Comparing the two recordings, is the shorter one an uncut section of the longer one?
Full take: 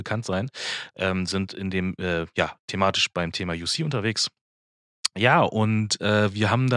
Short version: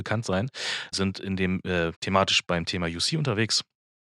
no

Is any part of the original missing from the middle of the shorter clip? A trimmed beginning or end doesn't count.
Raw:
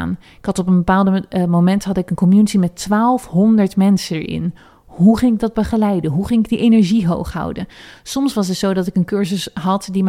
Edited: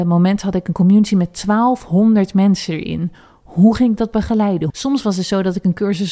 yes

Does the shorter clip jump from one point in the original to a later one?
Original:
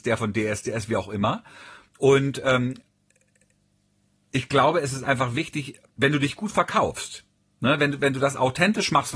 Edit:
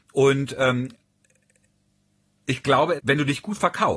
yes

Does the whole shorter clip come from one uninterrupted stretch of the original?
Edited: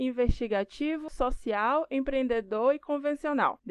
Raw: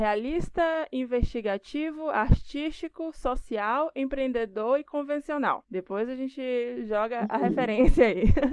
no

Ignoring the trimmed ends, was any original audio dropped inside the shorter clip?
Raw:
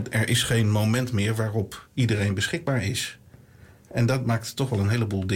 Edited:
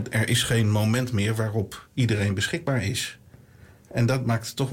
no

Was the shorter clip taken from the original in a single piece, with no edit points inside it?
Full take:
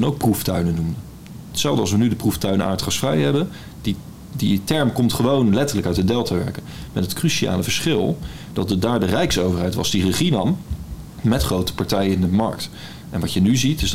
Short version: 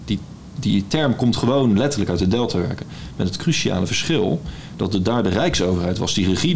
yes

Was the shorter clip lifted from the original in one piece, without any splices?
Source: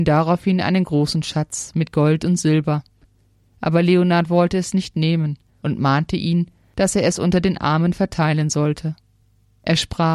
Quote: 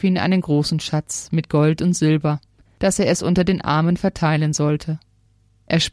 no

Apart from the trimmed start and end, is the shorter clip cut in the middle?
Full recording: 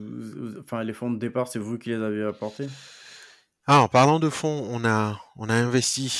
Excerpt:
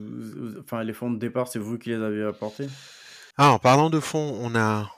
yes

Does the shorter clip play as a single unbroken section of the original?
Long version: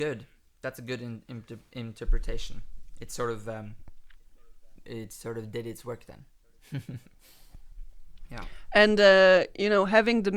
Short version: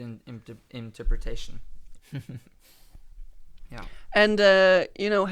no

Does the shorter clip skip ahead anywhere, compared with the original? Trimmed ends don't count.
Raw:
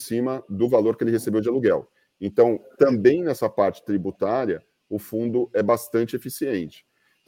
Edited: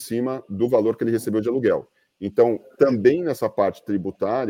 no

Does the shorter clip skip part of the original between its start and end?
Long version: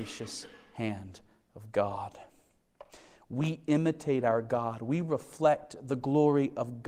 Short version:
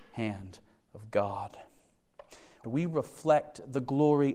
yes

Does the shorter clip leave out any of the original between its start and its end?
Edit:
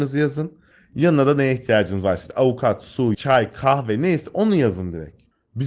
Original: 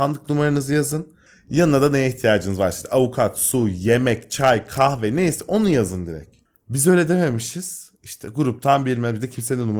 yes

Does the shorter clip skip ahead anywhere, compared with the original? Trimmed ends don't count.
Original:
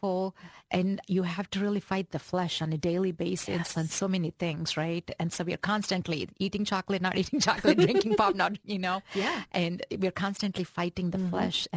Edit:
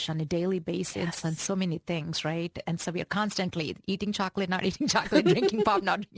no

